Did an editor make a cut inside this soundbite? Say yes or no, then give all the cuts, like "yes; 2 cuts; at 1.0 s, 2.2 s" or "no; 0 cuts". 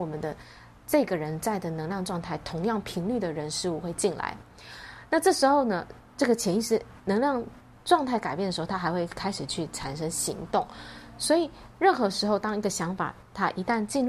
no; 0 cuts